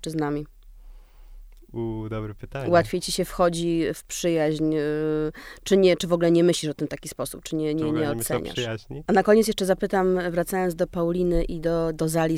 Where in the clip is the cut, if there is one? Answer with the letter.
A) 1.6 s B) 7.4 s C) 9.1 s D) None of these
C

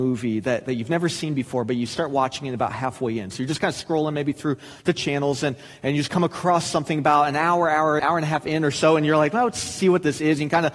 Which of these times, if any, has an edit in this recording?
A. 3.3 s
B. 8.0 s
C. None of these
B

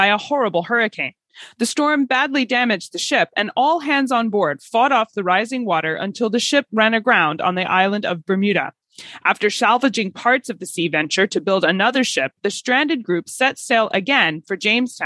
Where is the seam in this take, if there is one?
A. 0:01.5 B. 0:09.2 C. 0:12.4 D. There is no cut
D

